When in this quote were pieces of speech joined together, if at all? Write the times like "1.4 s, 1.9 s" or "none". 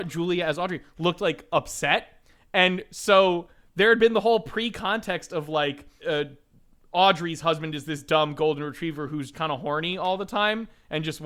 6.0 s, 9.3 s